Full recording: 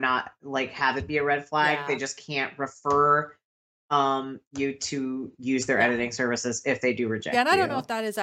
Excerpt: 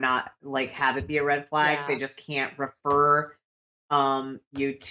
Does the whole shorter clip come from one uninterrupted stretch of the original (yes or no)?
yes